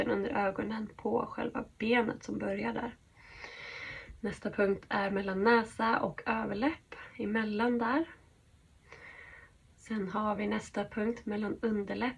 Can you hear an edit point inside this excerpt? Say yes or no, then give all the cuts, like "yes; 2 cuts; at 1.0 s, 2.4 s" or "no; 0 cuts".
no; 0 cuts